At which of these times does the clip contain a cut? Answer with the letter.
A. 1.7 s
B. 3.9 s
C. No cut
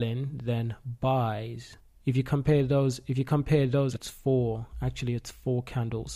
B